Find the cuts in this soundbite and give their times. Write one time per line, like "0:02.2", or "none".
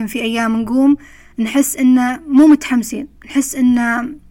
0:03.2